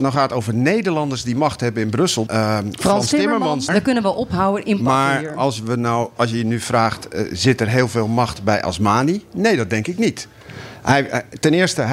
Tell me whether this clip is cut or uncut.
cut